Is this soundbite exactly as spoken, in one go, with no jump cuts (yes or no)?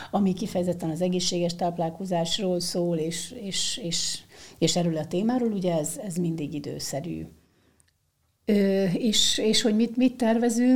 yes